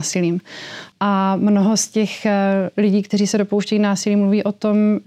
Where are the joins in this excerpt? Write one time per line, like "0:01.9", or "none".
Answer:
0:00.9

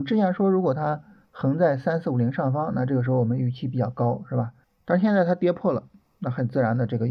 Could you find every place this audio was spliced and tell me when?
0:04.6

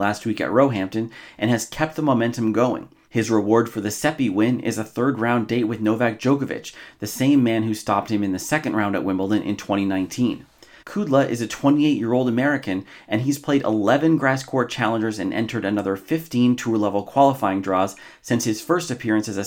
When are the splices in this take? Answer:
0:03.0
0:10.8

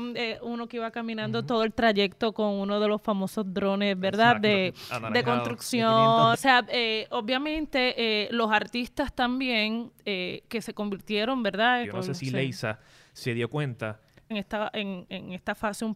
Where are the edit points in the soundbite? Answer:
0:06.3
0:11.8
0:14.3

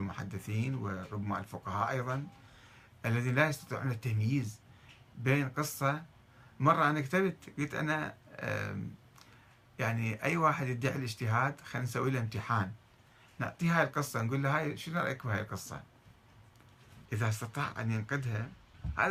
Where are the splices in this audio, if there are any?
0:17.1

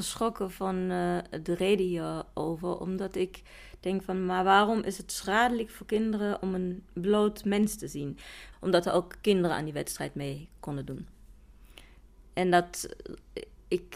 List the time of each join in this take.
0:08.5

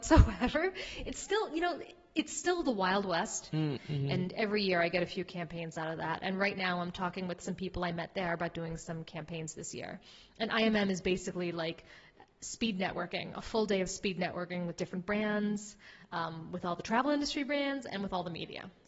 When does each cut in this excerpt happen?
0:03.8

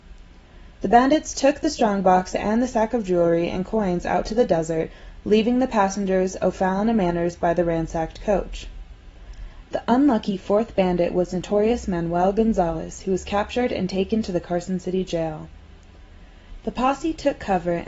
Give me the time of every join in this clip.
0:09.6
0:16.6

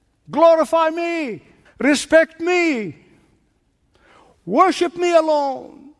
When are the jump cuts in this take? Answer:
0:01.6

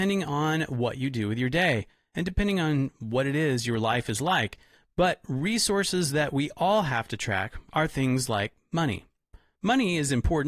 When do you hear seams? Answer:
none

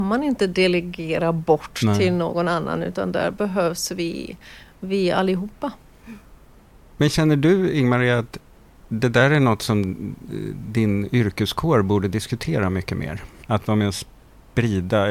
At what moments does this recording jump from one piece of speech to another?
0:13.4

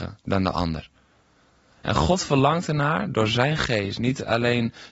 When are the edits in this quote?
none

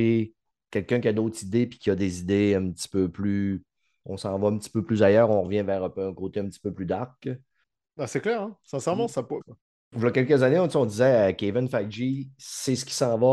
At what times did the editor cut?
0:09.4

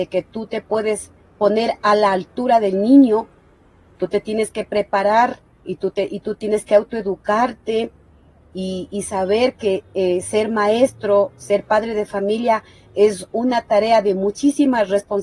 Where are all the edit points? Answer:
none

